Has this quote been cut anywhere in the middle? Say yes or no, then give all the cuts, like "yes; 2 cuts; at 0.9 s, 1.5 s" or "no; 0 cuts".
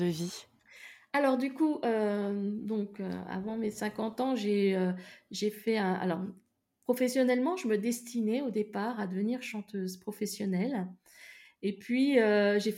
no; 0 cuts